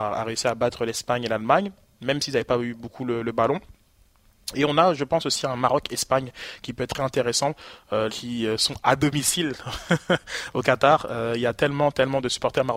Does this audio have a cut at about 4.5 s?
no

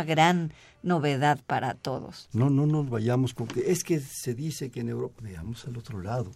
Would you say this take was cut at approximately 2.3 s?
yes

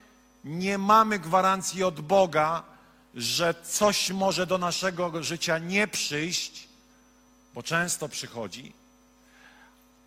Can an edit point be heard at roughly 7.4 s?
no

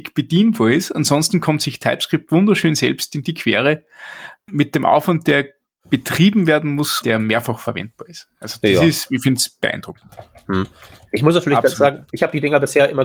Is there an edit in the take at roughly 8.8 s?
no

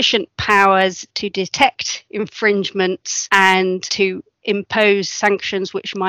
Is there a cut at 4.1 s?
no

